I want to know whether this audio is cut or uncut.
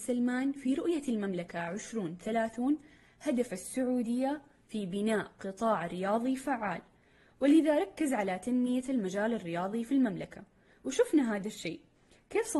uncut